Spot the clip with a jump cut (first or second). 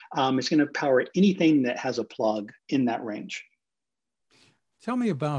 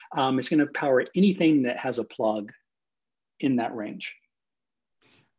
first